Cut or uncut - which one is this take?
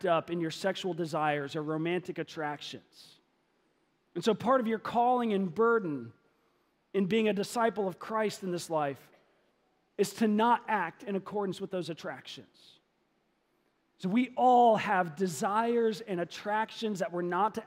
cut